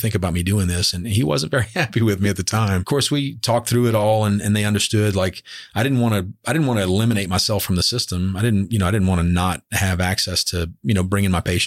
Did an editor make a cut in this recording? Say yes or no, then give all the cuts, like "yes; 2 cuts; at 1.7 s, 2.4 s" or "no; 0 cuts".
no; 0 cuts